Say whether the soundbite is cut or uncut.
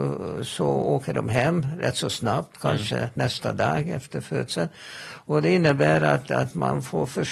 uncut